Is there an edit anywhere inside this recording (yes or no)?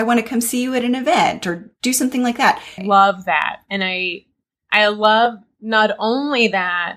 yes